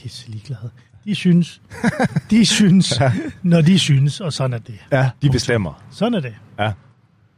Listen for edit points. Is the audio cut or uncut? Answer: cut